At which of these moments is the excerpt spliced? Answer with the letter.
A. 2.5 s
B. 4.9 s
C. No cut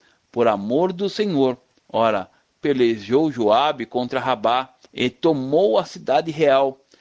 B